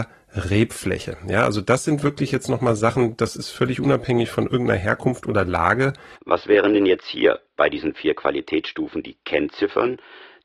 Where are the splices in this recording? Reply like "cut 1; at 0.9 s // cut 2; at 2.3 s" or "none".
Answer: cut 1; at 6.1 s